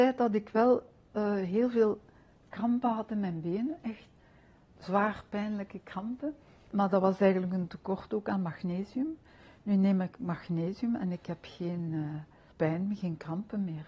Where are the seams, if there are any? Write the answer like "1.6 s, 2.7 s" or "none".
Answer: none